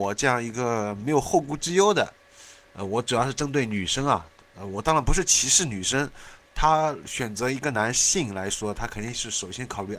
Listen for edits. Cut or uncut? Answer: cut